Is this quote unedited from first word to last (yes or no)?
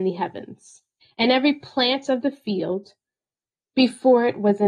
no